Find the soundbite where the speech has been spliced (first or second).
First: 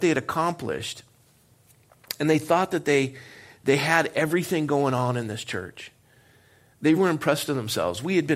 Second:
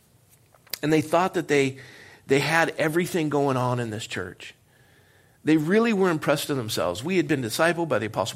first